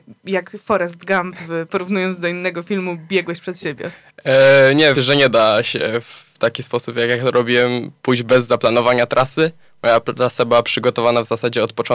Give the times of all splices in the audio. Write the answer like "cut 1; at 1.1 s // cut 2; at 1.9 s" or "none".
cut 1; at 4.9 s